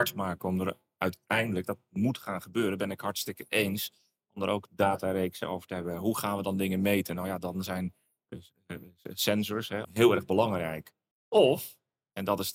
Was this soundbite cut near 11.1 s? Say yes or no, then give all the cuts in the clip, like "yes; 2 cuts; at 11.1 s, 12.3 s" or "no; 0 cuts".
yes; 2 cuts; at 9.8 s, 11.1 s